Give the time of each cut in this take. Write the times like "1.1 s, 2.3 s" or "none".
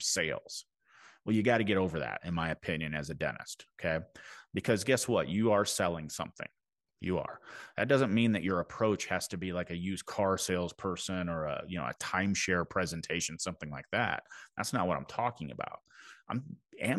none